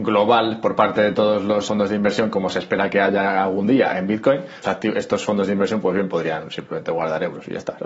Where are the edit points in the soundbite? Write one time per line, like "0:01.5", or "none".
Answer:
0:01.7
0:04.6